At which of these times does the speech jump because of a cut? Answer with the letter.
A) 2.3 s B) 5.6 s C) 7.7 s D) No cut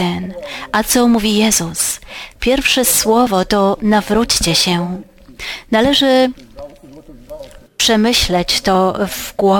C